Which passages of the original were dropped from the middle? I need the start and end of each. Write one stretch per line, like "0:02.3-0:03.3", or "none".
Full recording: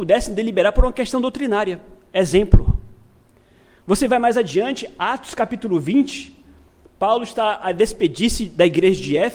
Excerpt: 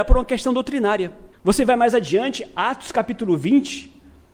0:02.0-0:03.8